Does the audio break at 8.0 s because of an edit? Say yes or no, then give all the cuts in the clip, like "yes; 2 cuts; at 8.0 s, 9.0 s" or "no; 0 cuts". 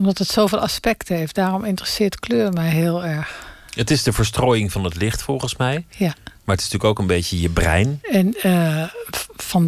yes; 1 cut; at 8.0 s